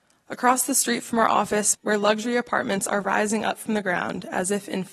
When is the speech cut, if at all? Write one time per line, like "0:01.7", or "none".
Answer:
0:01.7